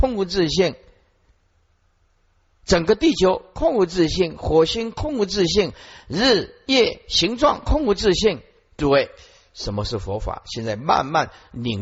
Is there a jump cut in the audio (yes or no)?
no